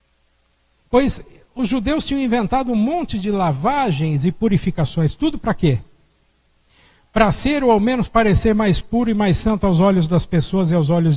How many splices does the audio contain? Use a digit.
0